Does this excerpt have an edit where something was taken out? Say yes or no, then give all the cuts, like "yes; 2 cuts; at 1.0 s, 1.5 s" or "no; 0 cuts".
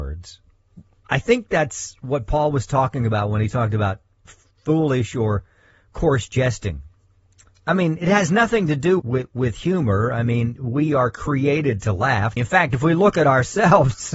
yes; 2 cuts; at 9.0 s, 12.4 s